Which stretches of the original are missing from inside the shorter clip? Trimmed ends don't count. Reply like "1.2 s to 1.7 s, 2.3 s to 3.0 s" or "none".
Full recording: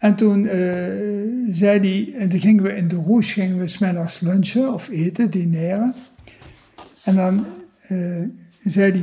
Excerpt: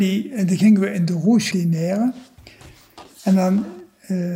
3.3 s to 5.3 s